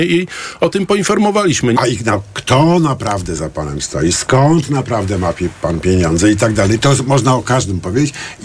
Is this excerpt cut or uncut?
cut